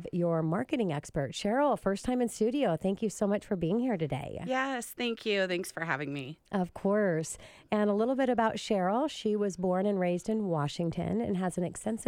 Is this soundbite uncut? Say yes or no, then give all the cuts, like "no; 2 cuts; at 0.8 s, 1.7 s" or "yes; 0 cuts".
yes; 0 cuts